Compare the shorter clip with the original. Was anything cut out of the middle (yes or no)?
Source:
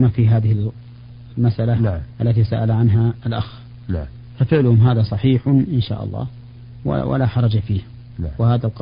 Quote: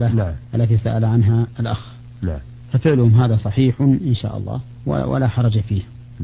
yes